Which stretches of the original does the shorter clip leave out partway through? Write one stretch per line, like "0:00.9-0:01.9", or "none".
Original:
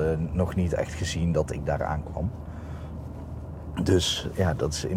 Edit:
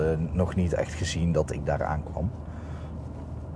none